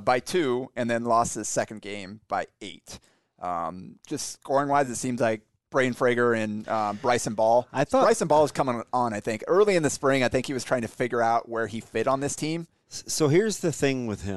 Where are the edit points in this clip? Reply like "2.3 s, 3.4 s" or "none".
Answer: none